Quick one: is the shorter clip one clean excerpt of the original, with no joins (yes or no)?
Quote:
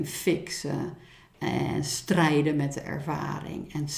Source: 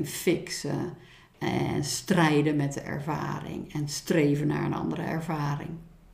yes